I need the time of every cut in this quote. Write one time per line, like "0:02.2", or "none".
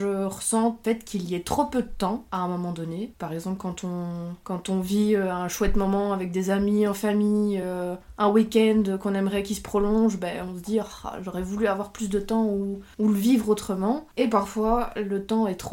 none